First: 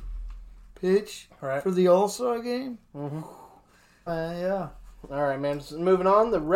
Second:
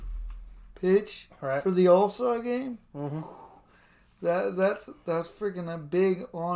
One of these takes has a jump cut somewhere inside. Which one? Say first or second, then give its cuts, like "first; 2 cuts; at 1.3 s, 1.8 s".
first; 1 cut; at 4.1 s